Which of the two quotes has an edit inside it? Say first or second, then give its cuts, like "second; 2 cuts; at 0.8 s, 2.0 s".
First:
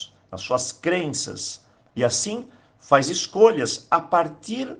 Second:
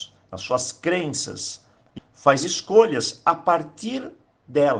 second; 1 cut; at 2.0 s